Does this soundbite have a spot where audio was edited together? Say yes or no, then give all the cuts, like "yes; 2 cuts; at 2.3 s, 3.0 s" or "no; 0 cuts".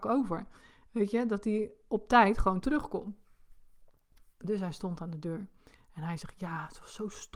no; 0 cuts